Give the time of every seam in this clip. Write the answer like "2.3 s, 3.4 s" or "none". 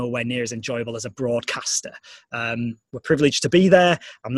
none